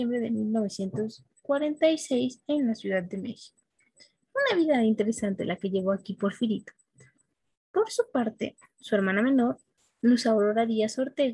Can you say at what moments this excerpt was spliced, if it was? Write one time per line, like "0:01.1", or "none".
0:04.2